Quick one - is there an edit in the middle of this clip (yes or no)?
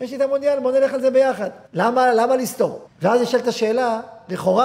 yes